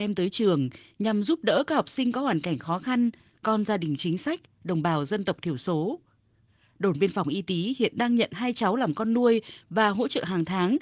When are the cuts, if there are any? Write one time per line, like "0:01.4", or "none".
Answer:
none